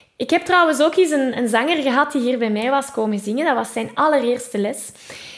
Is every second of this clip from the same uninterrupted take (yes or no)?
yes